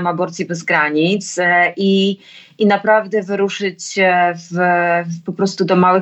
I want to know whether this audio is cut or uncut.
uncut